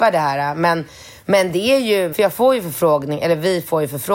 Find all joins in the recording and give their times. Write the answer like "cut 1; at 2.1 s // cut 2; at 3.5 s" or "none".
cut 1; at 2.1 s